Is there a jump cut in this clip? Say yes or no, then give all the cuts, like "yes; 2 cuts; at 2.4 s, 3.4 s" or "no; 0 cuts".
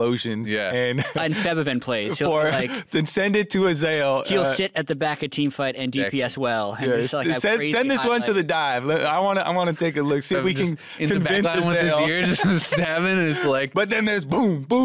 no; 0 cuts